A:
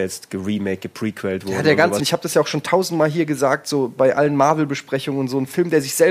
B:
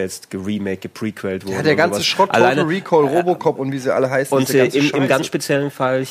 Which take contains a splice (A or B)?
A